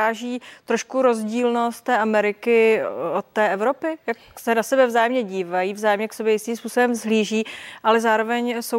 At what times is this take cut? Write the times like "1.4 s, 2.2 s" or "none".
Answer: none